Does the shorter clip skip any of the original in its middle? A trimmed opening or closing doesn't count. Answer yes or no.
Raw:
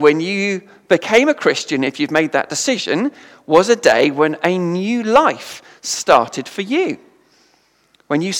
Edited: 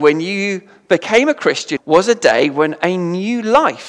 yes